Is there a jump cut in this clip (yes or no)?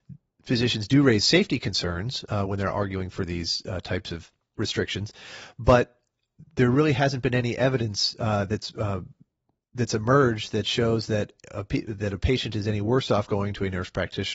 no